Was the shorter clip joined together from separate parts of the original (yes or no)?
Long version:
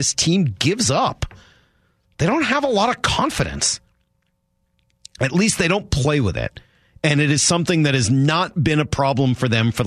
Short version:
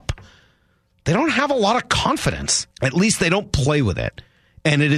yes